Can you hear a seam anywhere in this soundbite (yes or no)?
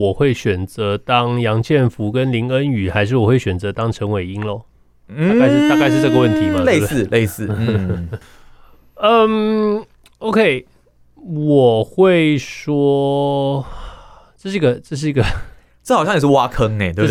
yes